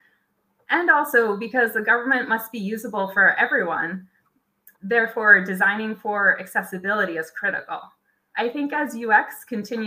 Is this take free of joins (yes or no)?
no